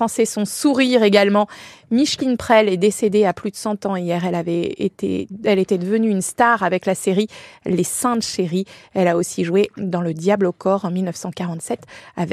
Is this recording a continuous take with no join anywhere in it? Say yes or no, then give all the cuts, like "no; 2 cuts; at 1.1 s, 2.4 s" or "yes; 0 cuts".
yes; 0 cuts